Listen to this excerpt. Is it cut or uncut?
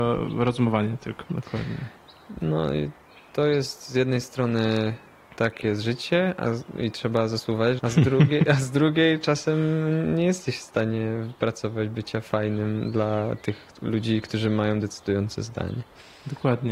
cut